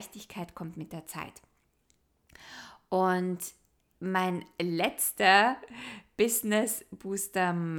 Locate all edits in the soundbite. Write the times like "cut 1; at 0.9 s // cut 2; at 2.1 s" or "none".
none